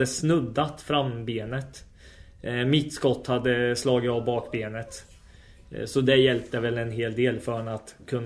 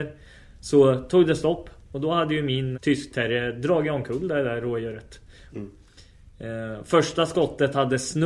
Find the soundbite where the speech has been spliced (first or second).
second